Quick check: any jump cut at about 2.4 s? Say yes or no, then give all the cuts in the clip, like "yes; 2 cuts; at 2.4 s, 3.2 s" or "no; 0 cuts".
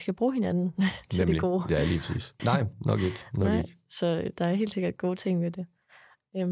yes; 1 cut; at 2.4 s